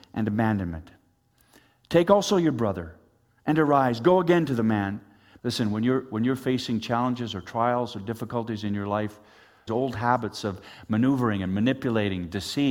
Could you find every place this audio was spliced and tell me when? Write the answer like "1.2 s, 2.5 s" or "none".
5.4 s, 9.7 s